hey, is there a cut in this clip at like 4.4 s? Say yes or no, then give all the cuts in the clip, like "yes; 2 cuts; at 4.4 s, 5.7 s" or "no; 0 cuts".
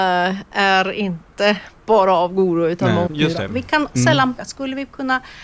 yes; 2 cuts; at 3.1 s, 4.4 s